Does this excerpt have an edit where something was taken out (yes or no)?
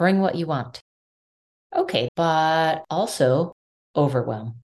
yes